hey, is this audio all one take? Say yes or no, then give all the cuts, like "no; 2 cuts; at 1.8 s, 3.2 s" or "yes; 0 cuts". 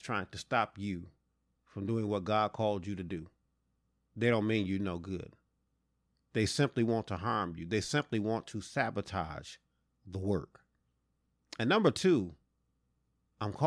no; 1 cut; at 11.4 s